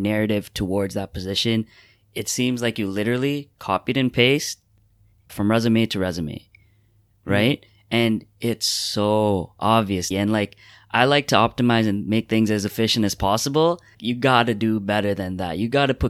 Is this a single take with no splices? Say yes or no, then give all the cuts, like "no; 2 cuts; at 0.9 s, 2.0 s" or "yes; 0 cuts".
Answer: no; 2 cuts; at 10.1 s, 13.9 s